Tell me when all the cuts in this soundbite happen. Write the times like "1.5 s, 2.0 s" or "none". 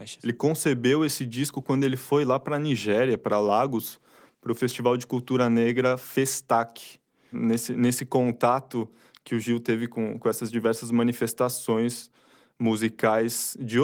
7.3 s